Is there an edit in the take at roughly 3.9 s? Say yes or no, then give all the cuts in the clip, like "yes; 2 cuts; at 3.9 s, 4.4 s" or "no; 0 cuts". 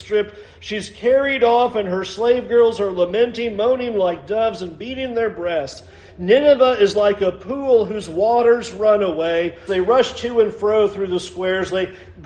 no; 1 cut; at 9.7 s